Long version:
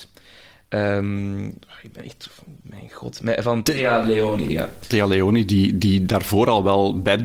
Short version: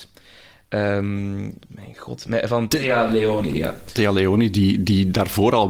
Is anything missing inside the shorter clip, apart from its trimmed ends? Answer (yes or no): yes